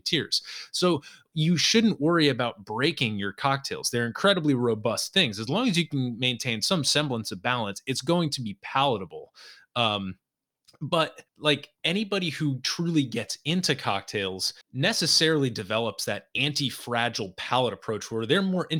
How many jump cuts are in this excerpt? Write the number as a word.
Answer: two